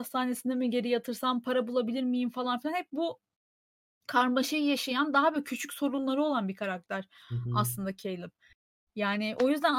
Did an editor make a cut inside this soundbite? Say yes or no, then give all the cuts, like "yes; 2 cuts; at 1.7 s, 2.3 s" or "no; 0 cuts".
no; 0 cuts